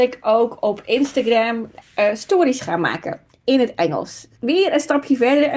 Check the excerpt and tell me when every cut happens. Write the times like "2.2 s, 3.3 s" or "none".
1.8 s, 4.4 s

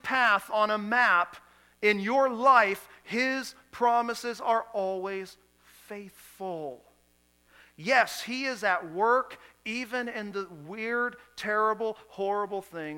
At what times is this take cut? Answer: none

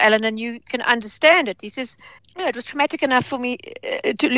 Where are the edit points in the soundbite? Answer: 2.2 s

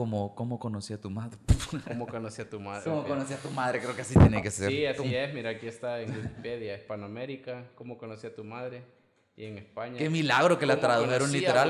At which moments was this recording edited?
2.9 s

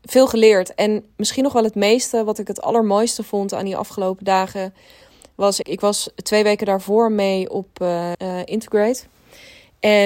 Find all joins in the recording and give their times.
5.6 s, 8.1 s

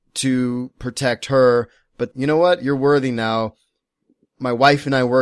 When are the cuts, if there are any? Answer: 2.1 s

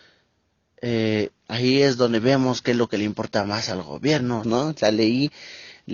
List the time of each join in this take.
4.4 s

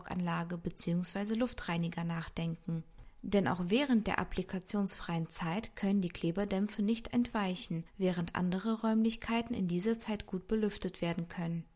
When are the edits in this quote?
none

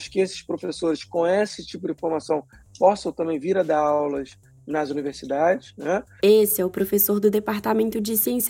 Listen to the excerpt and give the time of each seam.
6.2 s

